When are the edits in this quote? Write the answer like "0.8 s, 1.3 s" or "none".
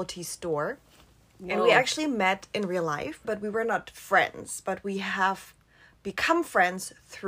3.2 s